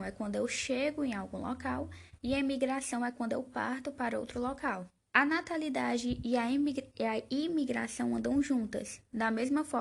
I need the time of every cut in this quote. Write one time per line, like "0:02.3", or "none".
0:05.0